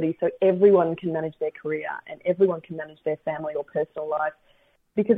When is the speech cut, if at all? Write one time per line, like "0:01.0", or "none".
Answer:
none